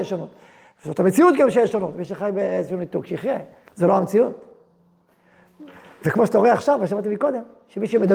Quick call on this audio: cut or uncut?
uncut